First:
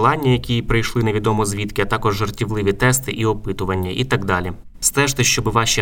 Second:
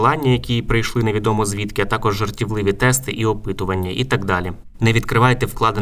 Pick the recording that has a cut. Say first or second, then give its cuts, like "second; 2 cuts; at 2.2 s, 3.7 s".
second; 1 cut; at 4.8 s